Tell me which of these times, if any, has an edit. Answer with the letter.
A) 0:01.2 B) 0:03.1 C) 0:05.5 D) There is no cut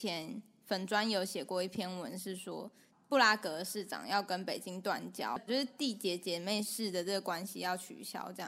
C